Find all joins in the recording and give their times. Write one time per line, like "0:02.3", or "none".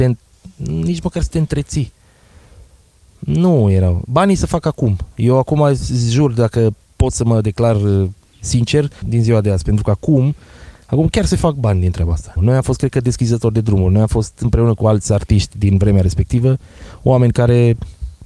0:09.0
0:12.4